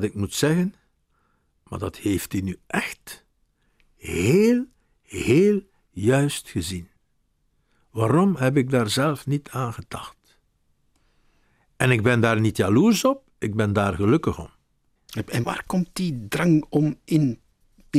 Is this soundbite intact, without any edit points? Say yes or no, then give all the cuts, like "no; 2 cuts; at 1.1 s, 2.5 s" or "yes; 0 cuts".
no; 1 cut; at 15.4 s